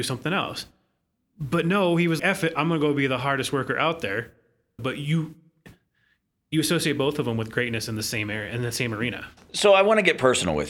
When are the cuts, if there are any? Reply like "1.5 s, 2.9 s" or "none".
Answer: 2.2 s, 4.8 s